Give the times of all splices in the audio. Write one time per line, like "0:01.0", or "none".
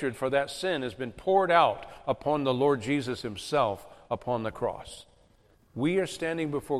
0:05.5